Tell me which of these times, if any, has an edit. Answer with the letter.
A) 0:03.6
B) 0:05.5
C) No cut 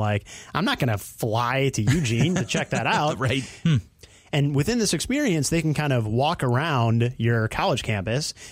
A